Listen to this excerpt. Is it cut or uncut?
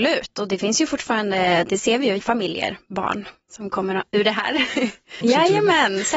cut